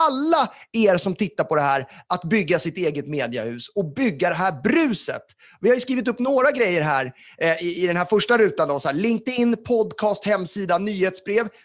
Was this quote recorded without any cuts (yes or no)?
yes